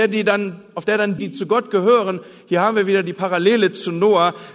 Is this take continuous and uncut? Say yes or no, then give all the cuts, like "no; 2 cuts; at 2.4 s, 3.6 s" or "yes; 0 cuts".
no; 1 cut; at 1.2 s